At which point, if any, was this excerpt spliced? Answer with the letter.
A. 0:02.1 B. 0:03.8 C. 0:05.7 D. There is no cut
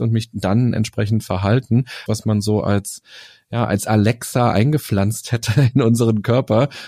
A